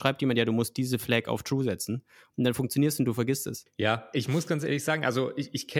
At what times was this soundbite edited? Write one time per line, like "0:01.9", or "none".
0:03.7